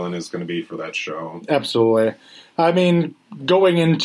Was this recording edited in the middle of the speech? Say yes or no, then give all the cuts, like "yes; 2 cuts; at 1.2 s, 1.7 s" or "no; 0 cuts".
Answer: no; 0 cuts